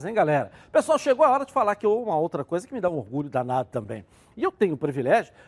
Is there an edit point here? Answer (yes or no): yes